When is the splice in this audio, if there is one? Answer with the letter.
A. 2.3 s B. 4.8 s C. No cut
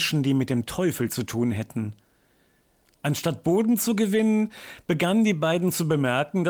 C